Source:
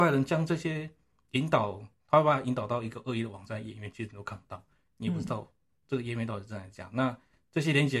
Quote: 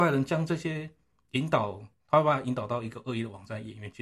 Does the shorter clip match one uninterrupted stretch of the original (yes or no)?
yes